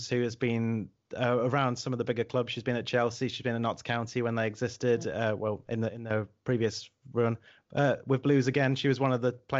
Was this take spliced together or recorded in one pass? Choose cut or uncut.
uncut